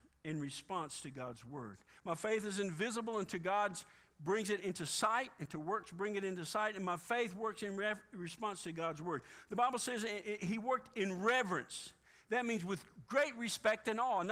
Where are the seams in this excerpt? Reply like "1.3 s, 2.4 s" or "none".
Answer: none